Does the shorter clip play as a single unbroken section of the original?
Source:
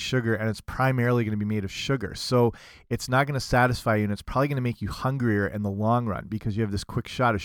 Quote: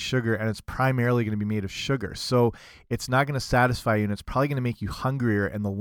yes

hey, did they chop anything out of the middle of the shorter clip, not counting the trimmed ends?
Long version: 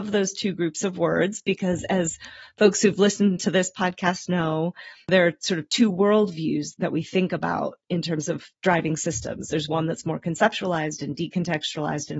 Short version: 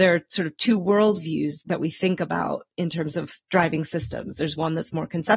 no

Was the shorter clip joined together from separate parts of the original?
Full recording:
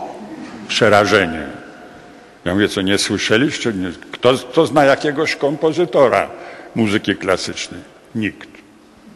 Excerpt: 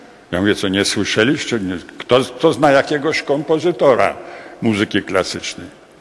no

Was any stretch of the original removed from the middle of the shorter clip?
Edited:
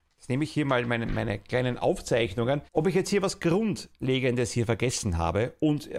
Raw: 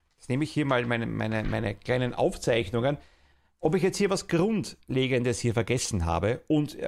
yes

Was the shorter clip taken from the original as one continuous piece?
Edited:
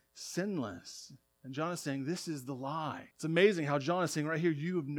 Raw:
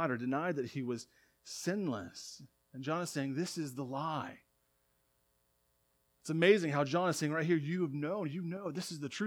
no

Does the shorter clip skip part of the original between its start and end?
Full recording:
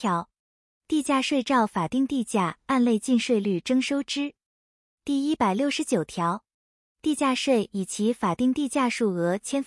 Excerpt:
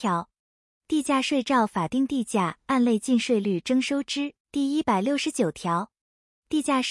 yes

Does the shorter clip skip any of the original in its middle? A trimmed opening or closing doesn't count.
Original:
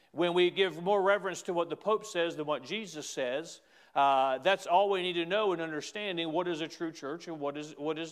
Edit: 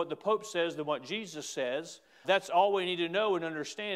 yes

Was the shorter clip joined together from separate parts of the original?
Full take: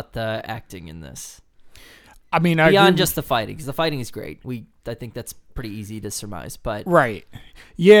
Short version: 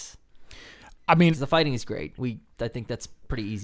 yes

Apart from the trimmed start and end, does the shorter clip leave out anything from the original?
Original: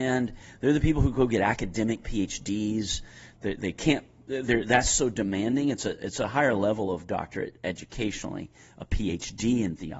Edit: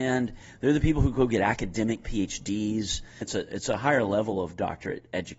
yes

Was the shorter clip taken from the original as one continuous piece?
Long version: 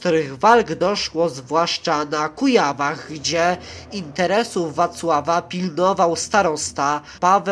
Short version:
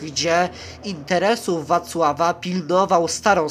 yes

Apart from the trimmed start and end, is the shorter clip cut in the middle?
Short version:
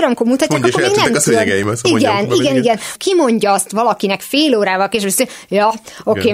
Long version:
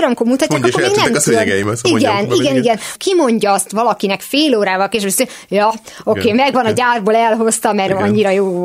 no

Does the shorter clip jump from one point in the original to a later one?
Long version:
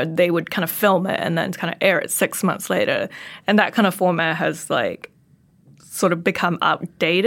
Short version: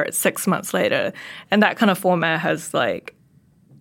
no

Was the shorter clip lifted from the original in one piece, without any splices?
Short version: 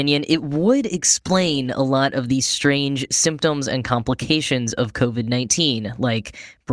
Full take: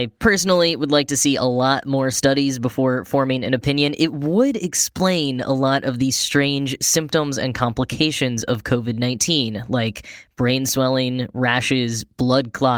yes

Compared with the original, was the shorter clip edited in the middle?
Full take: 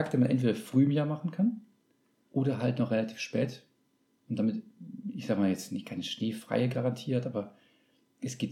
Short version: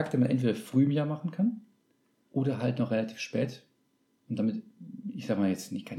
no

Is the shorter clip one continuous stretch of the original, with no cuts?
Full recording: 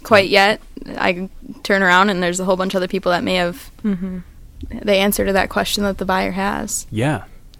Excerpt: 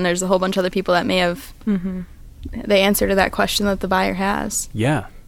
yes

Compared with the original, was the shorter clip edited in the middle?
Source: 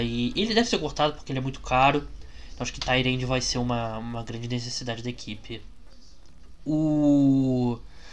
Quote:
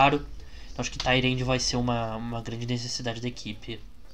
no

